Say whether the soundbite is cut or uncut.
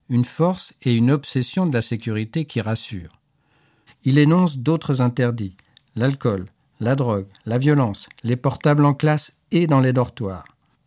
cut